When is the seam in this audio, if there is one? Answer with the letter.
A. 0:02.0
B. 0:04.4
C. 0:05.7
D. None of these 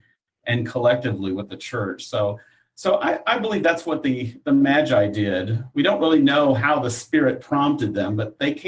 B